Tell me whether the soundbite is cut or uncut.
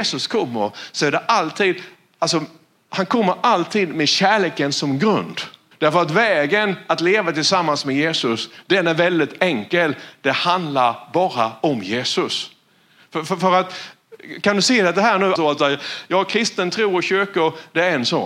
cut